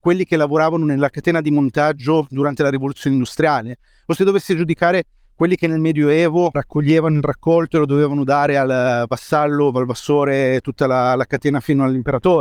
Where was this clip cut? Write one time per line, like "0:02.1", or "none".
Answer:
0:06.5